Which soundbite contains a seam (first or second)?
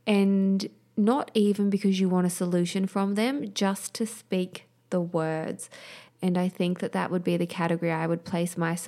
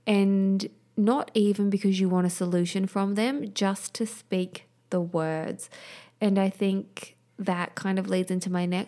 first